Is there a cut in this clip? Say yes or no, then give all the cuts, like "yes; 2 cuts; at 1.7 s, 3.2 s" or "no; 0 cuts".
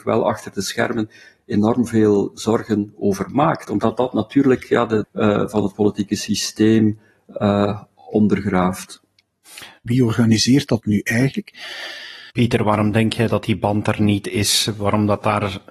yes; 3 cuts; at 5.0 s, 9.9 s, 12.3 s